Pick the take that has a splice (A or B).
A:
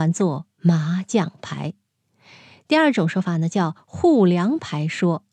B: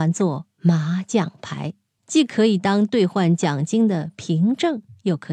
B